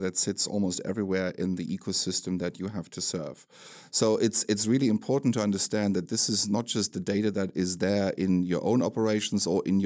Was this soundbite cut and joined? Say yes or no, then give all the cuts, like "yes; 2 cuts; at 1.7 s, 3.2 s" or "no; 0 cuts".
no; 0 cuts